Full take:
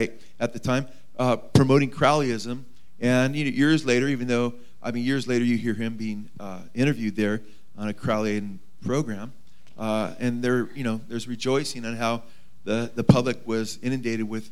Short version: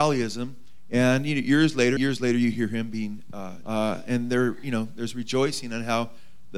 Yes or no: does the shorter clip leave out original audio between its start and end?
yes